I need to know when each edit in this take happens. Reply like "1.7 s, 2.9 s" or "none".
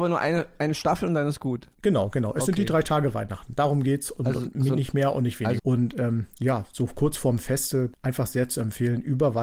5.6 s

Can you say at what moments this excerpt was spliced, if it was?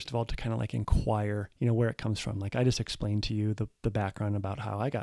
1.5 s

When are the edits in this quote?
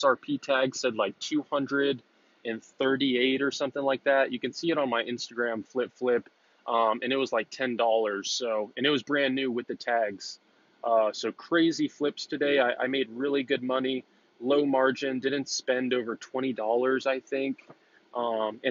none

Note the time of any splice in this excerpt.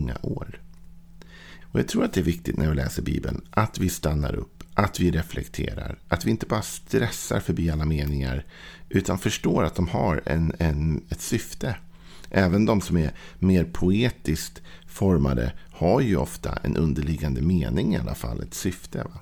1.6 s

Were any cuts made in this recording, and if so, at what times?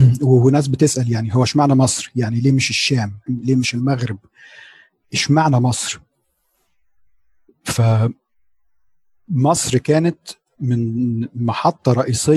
3.3 s, 7.5 s

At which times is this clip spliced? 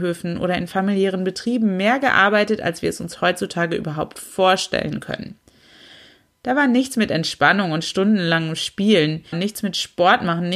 9.3 s

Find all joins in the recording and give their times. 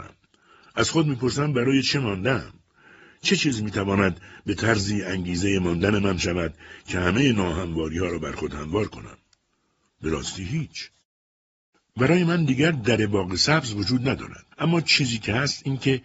14.5 s

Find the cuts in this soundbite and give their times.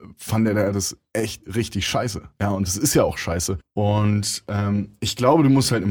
3.6 s

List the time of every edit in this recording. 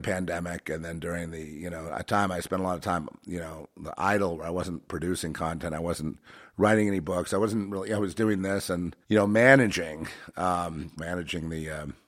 9.0 s, 11.0 s

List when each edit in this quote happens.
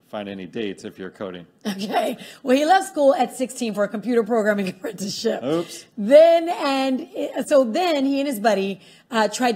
none

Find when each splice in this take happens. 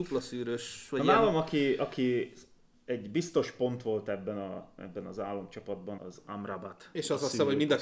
6.0 s

